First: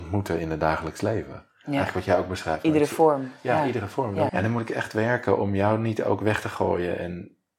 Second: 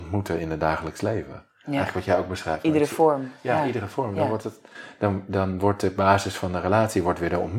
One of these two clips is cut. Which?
first; 1 cut; at 4.3 s

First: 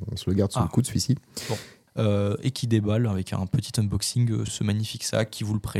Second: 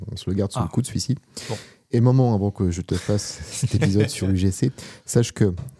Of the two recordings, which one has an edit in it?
first; 2 cuts; at 1.9 s, 4.5 s

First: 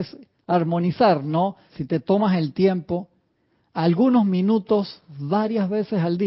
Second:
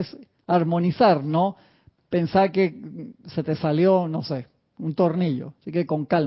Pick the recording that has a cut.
first; 1 cut; at 1.7 s

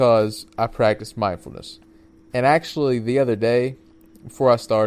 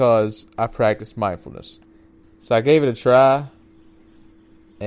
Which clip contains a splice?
second; 1 cut; at 2.2 s

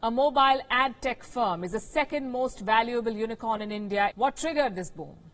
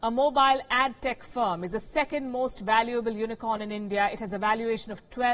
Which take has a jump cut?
first; 1 cut; at 4.1 s

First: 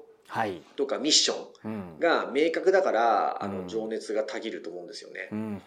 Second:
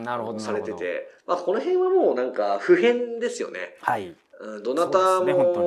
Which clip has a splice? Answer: second; 1 cut; at 1.2 s

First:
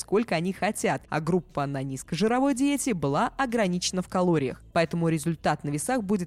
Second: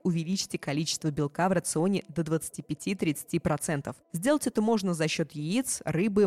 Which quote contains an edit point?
first; 1 cut; at 4.7 s

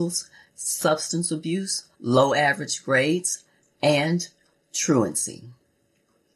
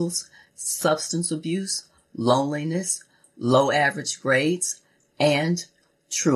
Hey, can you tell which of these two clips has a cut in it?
first; 1 cut; at 1.9 s

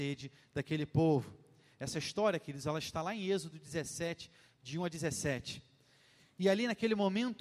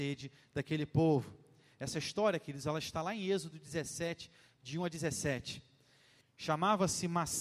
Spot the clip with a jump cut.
second; 1 cut; at 6.2 s

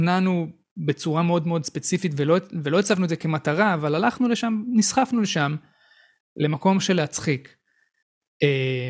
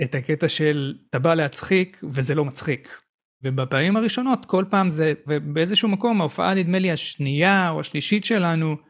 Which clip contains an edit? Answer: second; 2 cuts; at 3.4 s, 5.3 s

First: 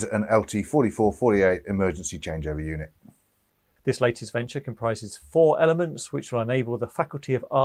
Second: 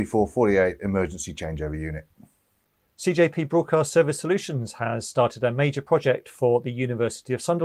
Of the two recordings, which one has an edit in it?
first; 1 cut; at 3.8 s

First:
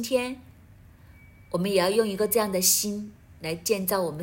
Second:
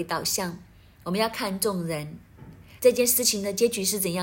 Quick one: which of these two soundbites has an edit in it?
second; 1 cut; at 2.8 s

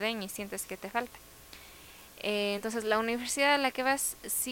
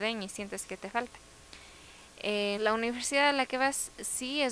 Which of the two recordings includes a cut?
second; 1 cut; at 2.6 s

